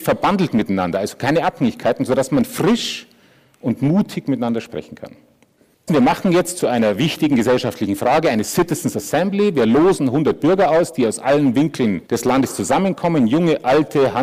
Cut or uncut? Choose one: cut